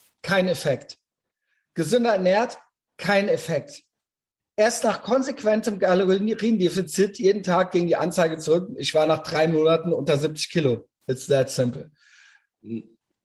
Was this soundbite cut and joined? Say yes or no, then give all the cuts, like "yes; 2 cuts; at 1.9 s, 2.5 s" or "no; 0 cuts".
no; 0 cuts